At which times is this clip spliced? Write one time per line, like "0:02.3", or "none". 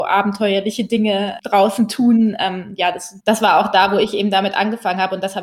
0:01.4
0:03.2